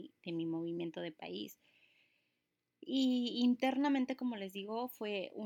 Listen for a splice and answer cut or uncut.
uncut